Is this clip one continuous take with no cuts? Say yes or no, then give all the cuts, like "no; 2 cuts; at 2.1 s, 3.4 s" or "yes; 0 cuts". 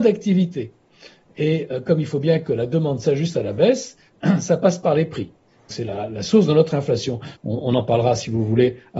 no; 2 cuts; at 5.7 s, 7.4 s